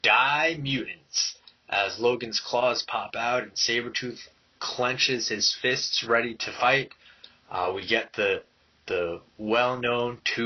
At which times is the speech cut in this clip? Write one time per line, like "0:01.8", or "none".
none